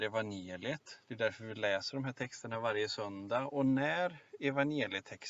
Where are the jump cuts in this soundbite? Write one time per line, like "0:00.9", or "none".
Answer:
none